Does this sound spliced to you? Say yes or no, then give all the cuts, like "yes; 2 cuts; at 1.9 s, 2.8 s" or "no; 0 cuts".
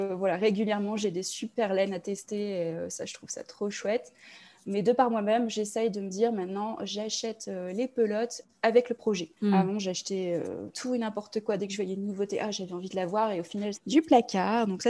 yes; 3 cuts; at 9.4 s, 10.7 s, 13.7 s